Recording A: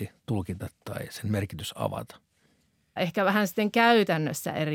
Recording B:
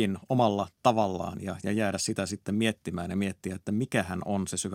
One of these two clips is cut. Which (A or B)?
A